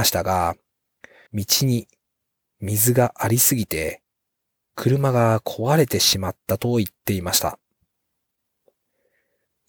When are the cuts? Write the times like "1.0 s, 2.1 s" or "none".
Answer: 1.3 s